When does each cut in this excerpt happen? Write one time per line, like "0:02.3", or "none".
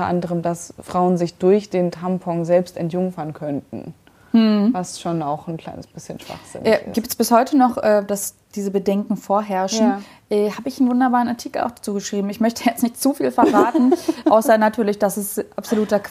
none